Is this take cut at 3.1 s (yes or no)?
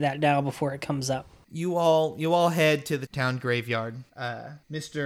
yes